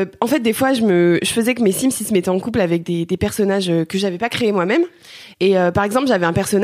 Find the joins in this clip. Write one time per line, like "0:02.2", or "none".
0:05.3